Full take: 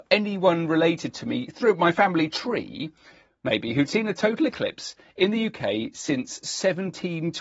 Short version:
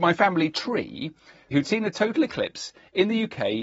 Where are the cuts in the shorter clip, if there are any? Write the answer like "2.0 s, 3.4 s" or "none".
1.5 s